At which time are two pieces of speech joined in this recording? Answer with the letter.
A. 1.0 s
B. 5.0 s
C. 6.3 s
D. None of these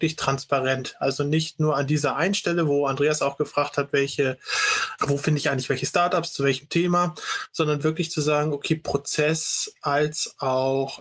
B